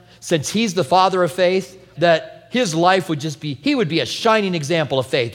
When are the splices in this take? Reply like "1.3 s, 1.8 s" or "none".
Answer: 2.0 s